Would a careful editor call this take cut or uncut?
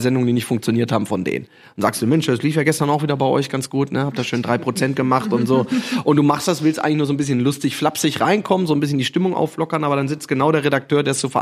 uncut